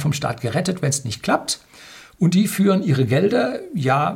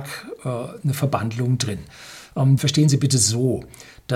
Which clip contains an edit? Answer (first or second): second